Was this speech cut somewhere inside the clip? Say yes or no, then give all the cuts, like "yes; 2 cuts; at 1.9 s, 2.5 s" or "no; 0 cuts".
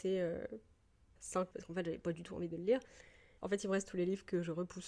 yes; 2 cuts; at 1.5 s, 3.4 s